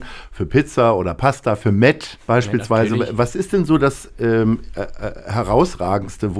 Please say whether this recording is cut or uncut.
cut